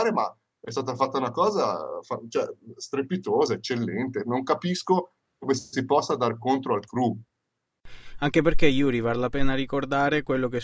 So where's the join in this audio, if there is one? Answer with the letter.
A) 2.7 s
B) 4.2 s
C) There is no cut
C